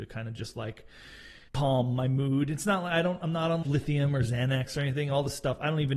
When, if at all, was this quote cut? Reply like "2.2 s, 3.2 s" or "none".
1.5 s, 3.6 s